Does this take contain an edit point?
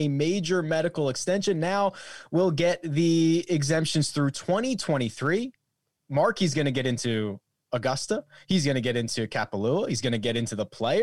no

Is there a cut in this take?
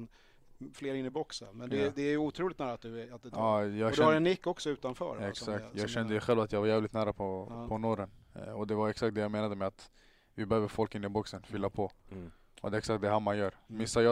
no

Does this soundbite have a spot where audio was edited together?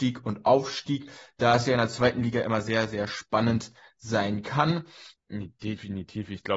yes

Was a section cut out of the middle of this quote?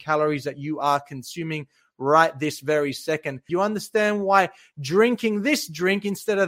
yes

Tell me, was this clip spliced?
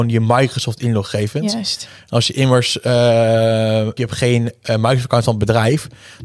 yes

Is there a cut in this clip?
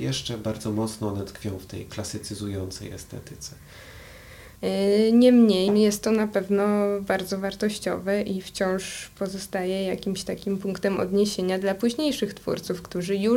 yes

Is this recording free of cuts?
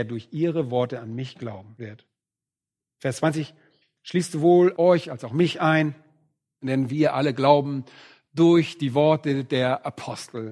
yes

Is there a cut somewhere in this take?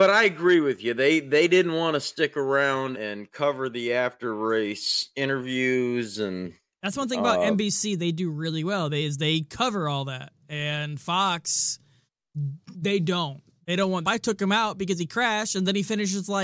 yes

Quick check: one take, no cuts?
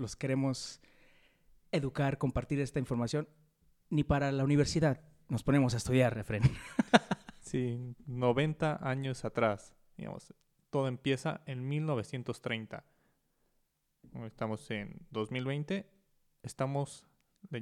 yes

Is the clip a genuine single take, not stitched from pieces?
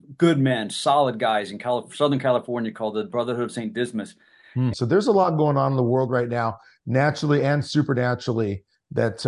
no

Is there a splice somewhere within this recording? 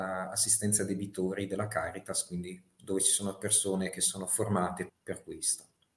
yes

